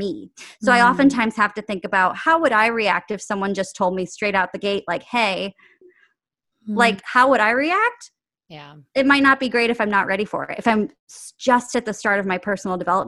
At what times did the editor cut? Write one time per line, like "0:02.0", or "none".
0:05.8